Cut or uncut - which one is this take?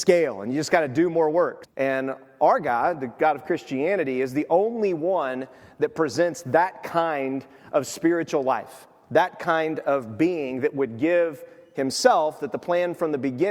cut